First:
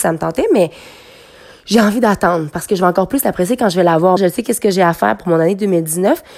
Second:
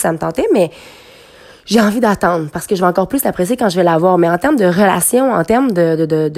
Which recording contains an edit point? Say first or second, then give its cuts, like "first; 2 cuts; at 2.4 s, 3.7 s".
first; 1 cut; at 4.2 s